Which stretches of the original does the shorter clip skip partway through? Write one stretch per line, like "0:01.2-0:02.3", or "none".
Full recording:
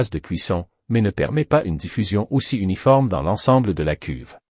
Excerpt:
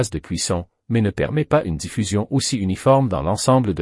none